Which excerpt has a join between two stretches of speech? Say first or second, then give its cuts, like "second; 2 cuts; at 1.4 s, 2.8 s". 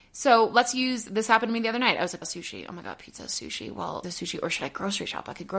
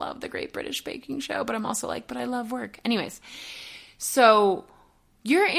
first; 2 cuts; at 2.2 s, 4.0 s